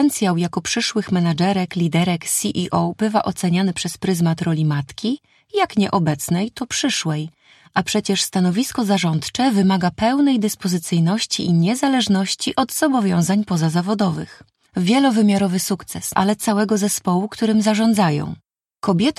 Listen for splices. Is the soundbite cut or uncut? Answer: cut